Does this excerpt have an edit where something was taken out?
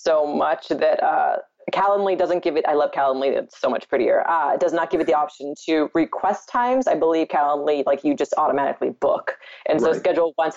no; 0 cuts

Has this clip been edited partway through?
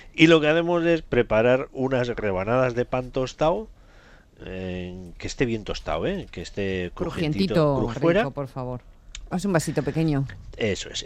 yes; 3 cuts; at 5.2 s, 7.9 s, 9.3 s

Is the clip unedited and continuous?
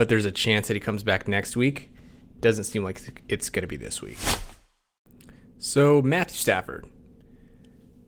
yes; 0 cuts

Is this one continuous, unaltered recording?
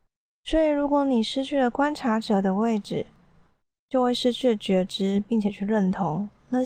yes; 0 cuts

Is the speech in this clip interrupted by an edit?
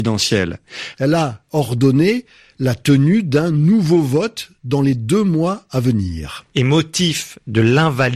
yes; 1 cut; at 0.9 s

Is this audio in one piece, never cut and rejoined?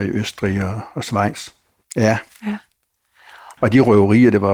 no; 2 cuts; at 1.8 s, 3.6 s

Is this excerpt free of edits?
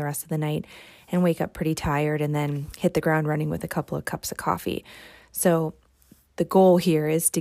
yes; 0 cuts

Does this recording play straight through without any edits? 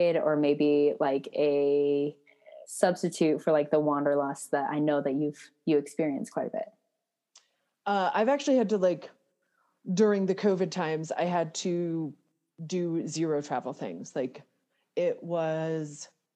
yes; 0 cuts

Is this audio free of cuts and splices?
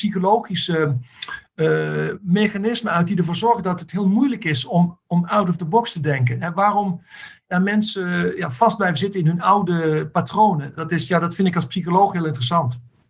yes; 0 cuts

